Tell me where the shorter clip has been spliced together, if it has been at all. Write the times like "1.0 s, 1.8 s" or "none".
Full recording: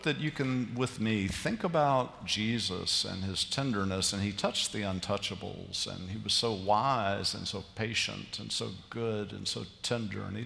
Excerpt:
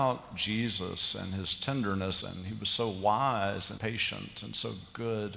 2.2 s, 3.8 s